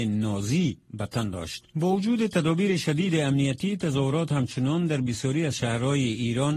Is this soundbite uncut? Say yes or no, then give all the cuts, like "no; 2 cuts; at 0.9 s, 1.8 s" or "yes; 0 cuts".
no; 1 cut; at 1.7 s